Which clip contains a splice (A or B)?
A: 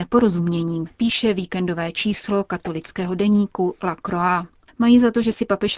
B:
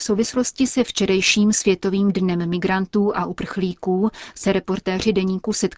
A